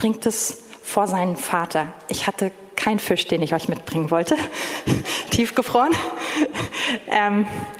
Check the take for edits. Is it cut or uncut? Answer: uncut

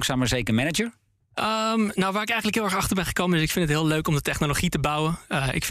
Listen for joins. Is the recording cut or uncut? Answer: uncut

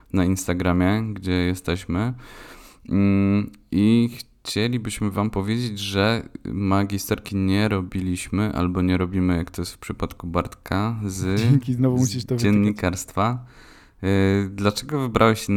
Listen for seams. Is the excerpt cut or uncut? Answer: uncut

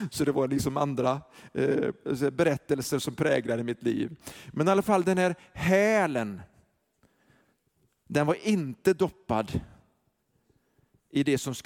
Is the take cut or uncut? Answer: uncut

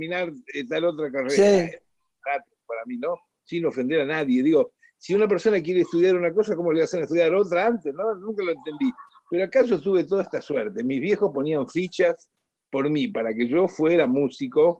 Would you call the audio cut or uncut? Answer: uncut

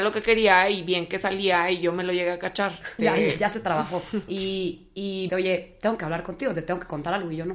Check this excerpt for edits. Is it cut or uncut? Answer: cut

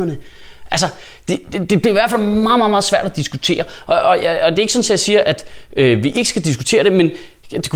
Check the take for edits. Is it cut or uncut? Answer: uncut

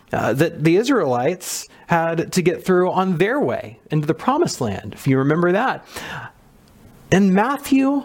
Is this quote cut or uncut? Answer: uncut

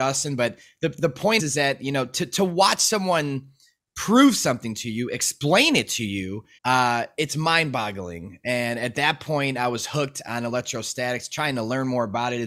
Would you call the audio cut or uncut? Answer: cut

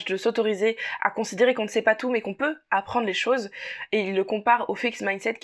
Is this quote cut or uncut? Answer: uncut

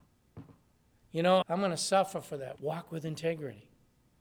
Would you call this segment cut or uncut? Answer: cut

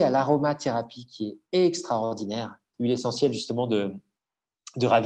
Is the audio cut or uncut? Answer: cut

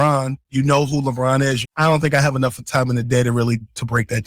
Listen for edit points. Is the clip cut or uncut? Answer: cut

